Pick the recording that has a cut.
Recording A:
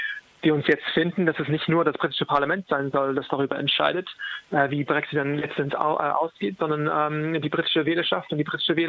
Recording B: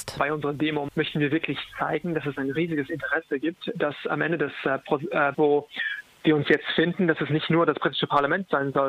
B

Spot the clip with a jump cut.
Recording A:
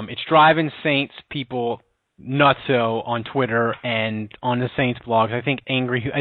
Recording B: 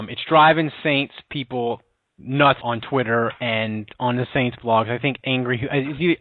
B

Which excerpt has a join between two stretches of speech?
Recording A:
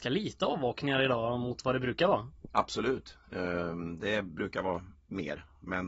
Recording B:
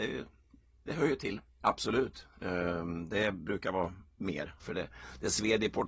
B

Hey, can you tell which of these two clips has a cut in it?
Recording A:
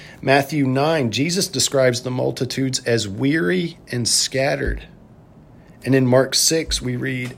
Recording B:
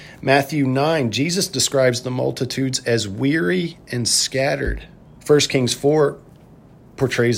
B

